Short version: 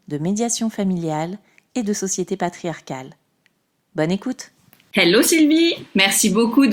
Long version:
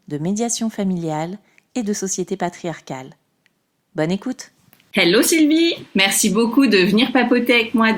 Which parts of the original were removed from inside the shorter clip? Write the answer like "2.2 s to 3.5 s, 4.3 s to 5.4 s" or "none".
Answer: none